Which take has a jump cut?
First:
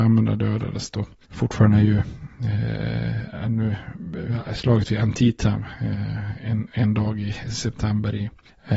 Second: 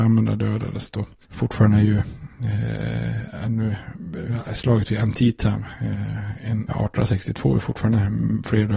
second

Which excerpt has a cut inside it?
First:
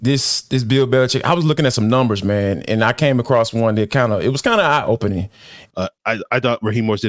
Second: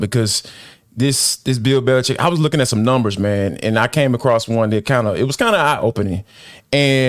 first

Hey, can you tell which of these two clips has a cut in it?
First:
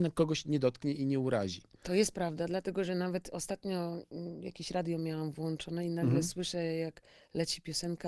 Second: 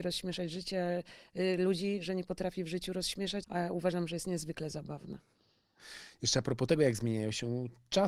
second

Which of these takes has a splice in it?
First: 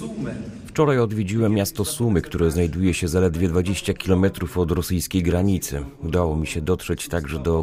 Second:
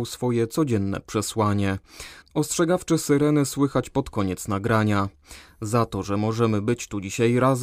second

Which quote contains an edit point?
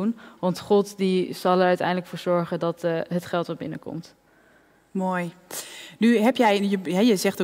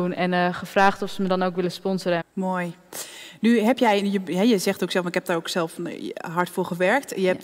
second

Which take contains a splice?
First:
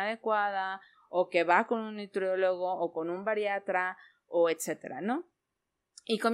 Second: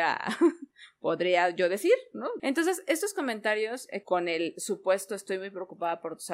second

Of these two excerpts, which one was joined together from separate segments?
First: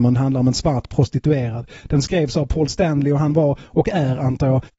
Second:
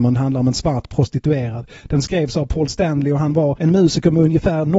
second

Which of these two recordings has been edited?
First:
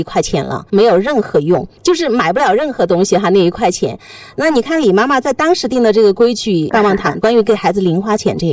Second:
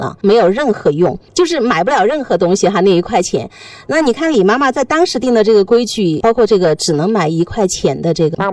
first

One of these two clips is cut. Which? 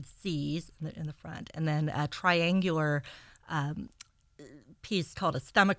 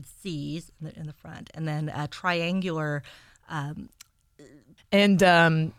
second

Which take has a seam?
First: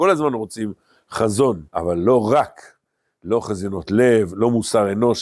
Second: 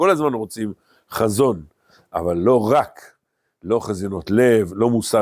first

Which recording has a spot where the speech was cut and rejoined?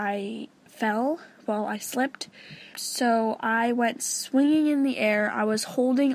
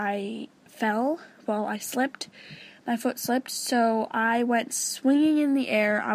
first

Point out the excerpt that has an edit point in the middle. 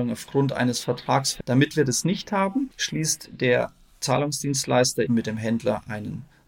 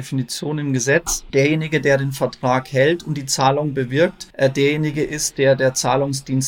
first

